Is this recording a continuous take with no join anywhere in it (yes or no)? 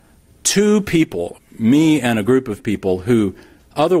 no